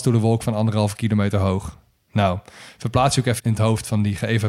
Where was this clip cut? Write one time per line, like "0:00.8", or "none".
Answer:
0:03.4